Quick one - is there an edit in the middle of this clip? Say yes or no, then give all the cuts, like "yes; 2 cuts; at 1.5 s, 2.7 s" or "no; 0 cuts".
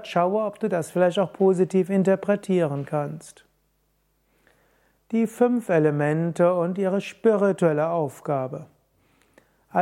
no; 0 cuts